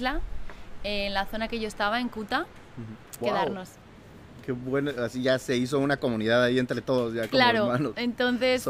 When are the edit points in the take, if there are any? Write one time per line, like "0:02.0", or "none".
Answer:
0:03.2

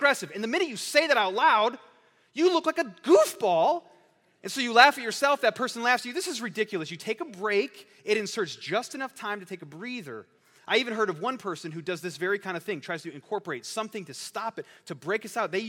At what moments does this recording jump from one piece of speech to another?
none

